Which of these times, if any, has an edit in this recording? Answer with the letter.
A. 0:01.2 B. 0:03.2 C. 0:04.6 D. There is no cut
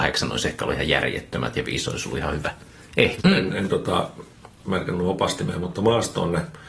B